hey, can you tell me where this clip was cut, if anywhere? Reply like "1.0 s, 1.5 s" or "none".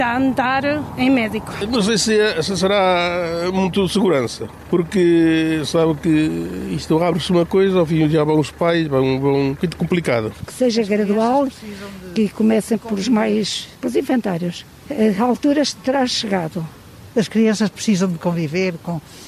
17.1 s